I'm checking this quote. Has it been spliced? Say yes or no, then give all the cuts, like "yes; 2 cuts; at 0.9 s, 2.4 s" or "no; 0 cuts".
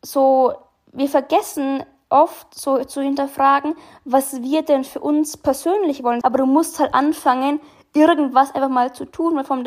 yes; 1 cut; at 6.2 s